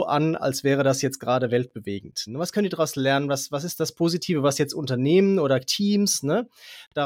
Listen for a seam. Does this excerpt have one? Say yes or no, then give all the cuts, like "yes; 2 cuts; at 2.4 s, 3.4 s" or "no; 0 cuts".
yes; 1 cut; at 2.3 s